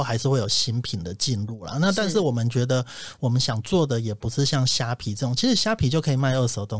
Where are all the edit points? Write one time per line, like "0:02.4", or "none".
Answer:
none